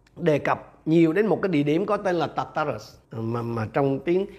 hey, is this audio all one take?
no; 1 cut; at 3.0 s

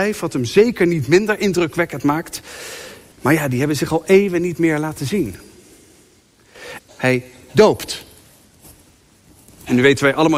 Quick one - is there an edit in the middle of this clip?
yes; 2 cuts; at 3.1 s, 6.8 s

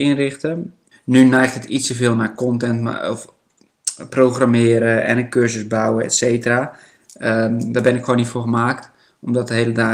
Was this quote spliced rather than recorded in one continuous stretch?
yes; 1 cut; at 0.9 s

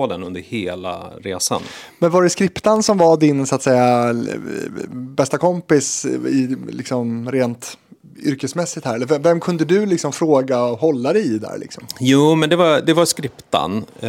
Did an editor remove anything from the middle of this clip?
no; 0 cuts

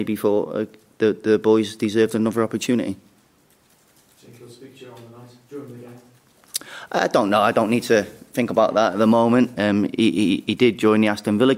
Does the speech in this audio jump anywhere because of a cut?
no; 0 cuts

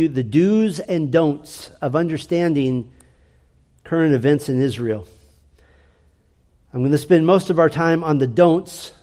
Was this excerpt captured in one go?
yes; 0 cuts

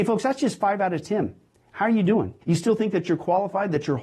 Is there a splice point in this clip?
yes; 1 cut; at 2.4 s

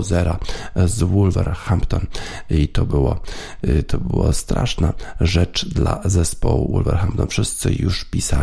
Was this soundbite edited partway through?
no; 0 cuts

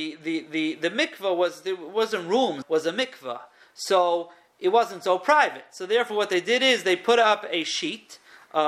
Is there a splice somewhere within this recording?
yes; 1 cut; at 2.6 s

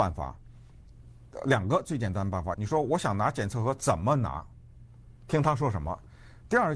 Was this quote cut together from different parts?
yes; 1 cut; at 2.5 s

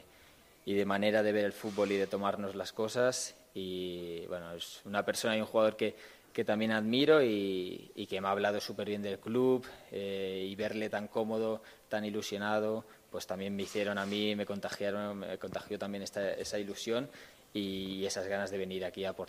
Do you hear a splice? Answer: no; 0 cuts

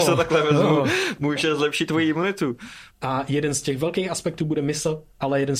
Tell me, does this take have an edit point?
yes; 1 cut; at 2.9 s

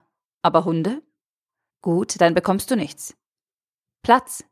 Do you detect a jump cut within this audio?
yes; 1 cut; at 1.7 s

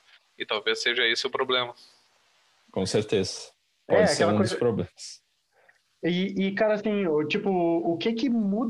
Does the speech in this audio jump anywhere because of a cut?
no; 0 cuts

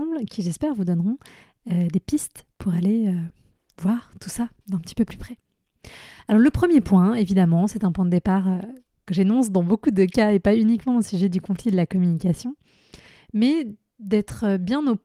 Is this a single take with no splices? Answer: yes; 0 cuts

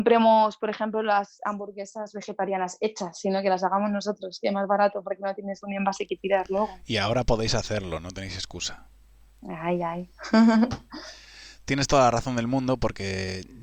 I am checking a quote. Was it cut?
no; 0 cuts

